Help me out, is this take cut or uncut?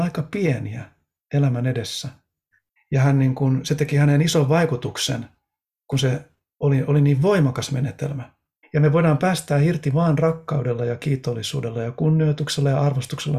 cut